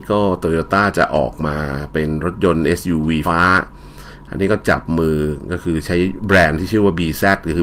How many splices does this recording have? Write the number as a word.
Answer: one